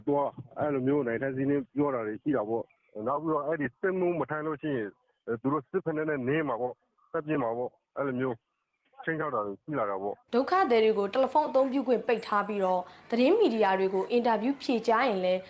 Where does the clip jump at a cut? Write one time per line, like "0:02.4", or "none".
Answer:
0:01.7
0:10.3